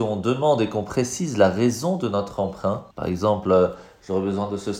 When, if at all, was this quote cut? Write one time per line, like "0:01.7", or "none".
0:02.9